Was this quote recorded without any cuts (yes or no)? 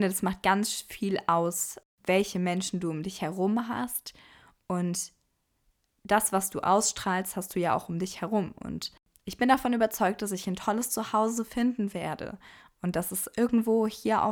yes